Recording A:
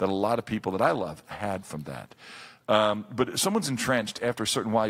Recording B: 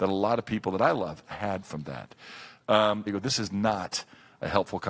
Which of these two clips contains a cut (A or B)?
B